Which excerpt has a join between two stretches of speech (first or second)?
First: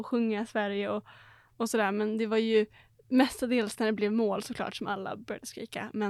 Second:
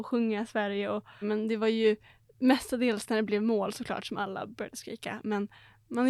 second